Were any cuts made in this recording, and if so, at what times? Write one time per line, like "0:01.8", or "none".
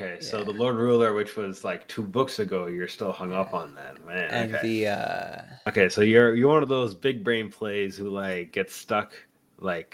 none